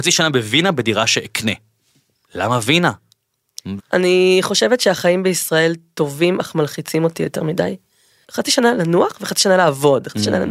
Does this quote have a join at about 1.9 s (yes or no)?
no